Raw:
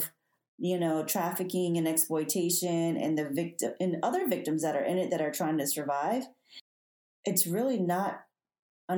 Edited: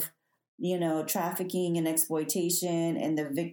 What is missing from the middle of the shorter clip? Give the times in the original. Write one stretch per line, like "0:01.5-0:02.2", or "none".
none